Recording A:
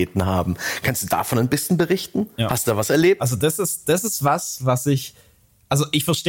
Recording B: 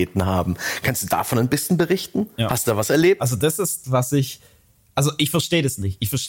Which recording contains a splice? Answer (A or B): B